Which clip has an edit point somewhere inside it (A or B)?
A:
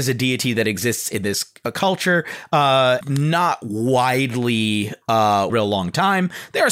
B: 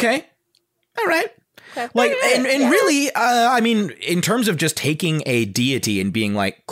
A